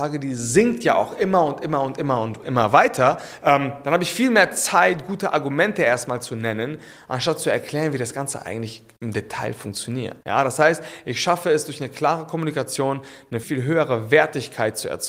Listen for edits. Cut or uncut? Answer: cut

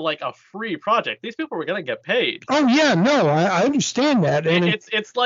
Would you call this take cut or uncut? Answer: uncut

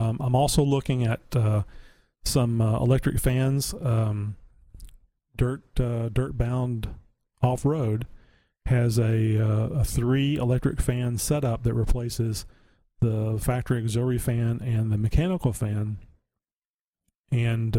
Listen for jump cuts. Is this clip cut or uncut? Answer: uncut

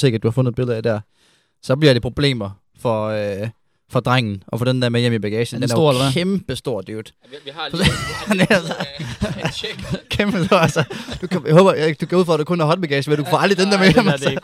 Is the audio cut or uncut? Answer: uncut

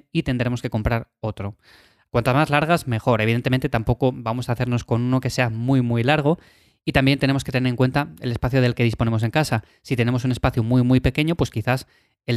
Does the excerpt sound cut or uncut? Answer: cut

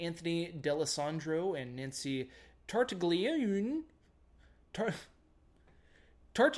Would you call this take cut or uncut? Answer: uncut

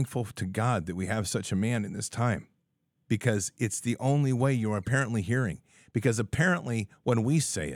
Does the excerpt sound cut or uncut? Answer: uncut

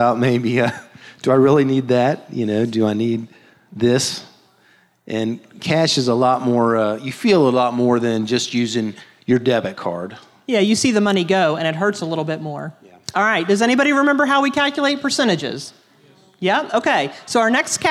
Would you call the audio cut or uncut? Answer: uncut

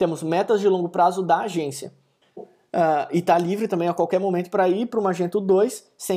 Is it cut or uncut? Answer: cut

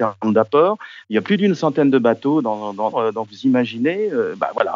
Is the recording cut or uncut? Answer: cut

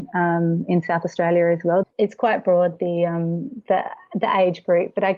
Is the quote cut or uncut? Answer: cut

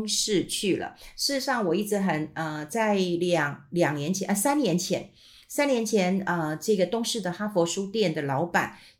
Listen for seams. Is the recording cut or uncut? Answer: uncut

